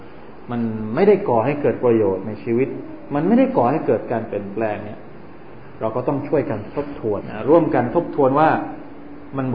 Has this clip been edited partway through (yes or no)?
yes